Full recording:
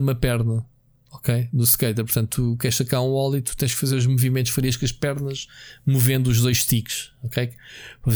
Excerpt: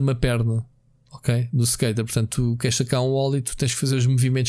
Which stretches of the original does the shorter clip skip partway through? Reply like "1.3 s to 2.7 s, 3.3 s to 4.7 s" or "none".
none